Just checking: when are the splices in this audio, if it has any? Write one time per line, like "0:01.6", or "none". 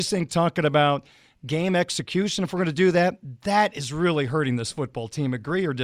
none